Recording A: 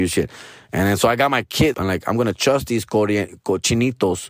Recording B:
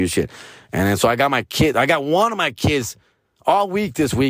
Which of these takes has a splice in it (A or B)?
A